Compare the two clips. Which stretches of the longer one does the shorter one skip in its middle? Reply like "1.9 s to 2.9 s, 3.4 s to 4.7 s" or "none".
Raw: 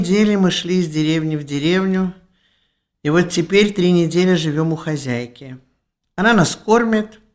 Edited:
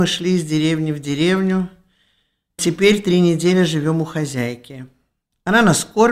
3.0 s to 3.3 s